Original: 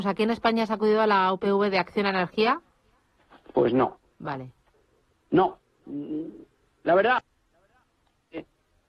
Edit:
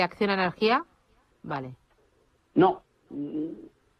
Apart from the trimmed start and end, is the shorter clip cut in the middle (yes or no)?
yes